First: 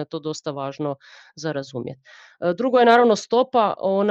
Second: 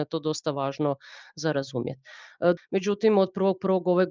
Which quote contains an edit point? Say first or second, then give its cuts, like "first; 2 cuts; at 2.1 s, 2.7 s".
second; 1 cut; at 2.6 s